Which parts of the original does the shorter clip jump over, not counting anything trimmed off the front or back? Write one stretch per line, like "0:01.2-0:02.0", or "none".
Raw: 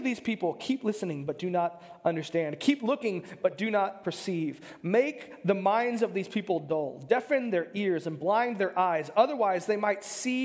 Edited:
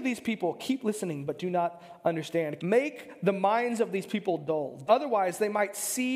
0:02.6-0:04.8
0:07.1-0:09.1